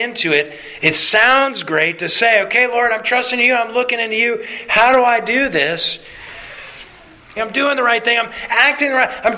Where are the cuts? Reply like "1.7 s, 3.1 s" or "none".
7.4 s